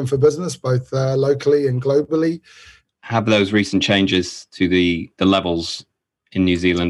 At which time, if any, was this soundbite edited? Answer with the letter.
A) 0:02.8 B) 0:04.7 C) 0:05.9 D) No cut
A